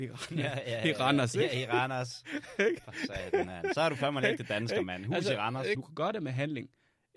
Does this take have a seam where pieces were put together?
yes; 1 cut; at 5.7 s

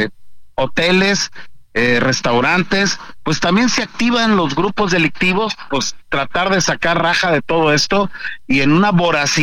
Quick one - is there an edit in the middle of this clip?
no; 0 cuts

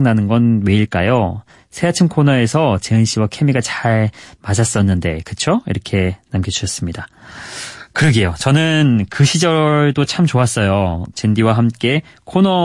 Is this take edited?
yes; 1 cut; at 11.1 s

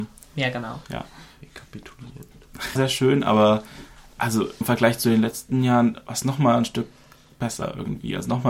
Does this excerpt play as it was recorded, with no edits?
no; 2 cuts; at 2.8 s, 4.6 s

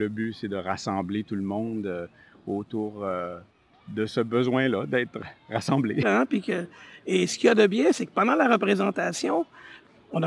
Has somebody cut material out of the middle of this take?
yes; 1 cut; at 6.0 s

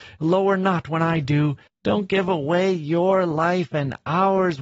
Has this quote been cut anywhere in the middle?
yes; 1 cut; at 1.7 s

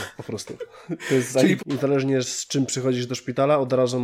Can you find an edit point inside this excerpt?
yes; 1 cut; at 1.6 s

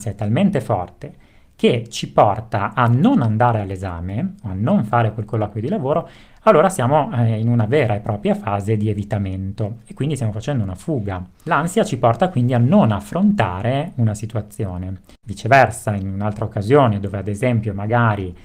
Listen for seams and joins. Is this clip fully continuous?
yes; 0 cuts

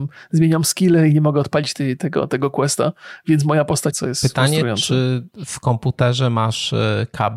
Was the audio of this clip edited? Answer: yes; 1 cut; at 3.9 s

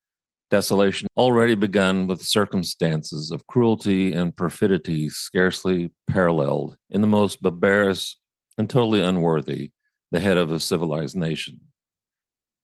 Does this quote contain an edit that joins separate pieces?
yes; 3 cuts; at 1.1 s, 6.8 s, 8.4 s

